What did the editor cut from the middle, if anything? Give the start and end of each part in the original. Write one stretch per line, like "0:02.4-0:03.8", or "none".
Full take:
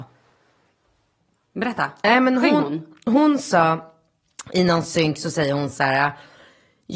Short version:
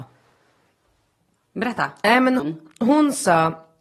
0:02.4-0:02.7